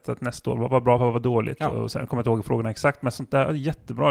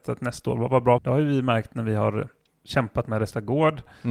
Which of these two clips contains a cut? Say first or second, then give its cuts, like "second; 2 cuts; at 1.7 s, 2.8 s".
second; 1 cut; at 1.0 s